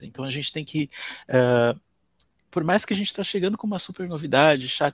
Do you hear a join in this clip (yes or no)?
no